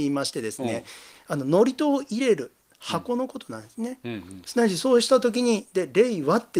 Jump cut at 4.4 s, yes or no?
yes